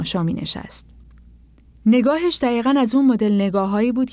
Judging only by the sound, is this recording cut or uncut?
uncut